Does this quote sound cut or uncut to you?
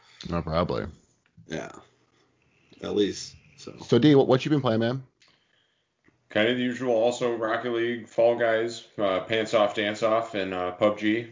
uncut